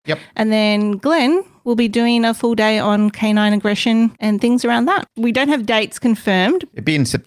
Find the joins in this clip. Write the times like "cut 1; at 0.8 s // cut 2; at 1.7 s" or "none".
cut 1; at 5.1 s